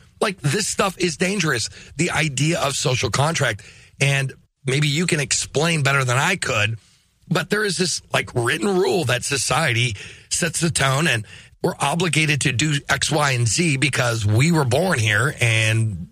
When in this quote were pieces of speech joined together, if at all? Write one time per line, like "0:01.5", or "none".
none